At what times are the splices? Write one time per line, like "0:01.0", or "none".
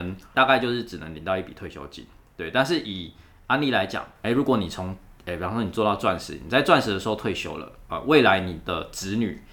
none

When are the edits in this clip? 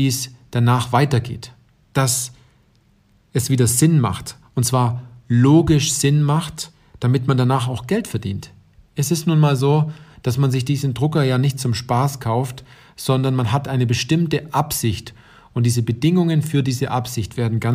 none

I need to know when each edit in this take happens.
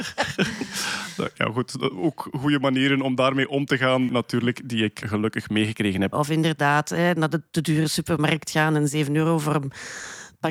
0:06.1

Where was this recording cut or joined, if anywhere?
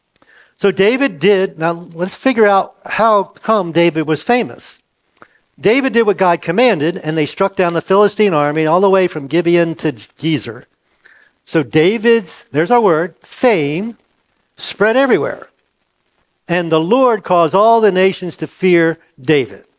none

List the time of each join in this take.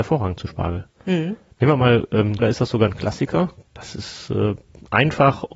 0:02.4
0:03.6

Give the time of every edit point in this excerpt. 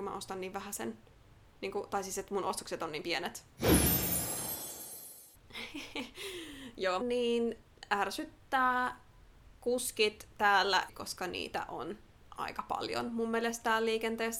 0:05.3
0:07.0
0:10.9

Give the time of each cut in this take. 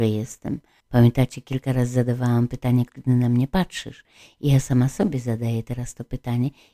0:02.9

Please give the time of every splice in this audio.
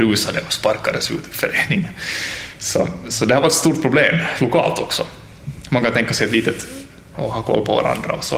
0:07.1

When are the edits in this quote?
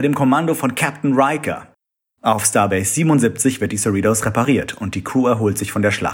0:02.1

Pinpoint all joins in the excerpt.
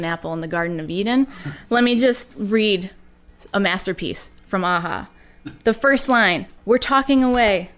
0:06.6

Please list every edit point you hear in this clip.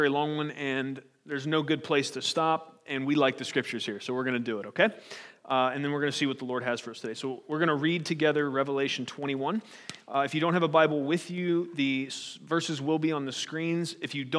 none

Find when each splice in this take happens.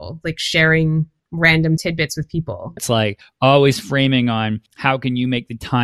0:02.8

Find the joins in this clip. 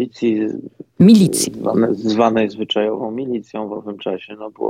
none

